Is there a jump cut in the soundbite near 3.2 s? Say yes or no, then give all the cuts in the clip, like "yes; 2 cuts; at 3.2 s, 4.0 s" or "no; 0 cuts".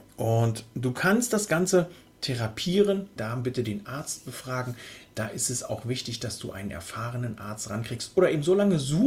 yes; 1 cut; at 3.2 s